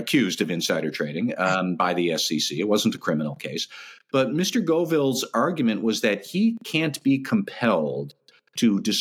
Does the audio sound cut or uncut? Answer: uncut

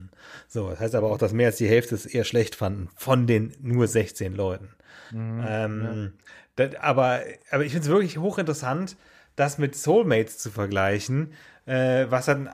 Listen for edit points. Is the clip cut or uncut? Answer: uncut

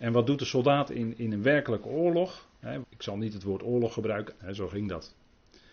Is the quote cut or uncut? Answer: cut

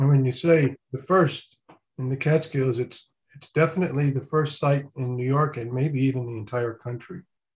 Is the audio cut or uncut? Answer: uncut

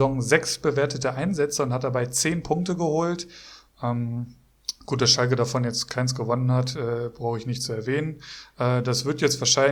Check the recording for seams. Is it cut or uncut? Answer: uncut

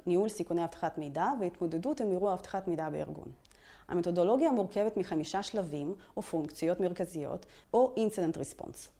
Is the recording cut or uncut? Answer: cut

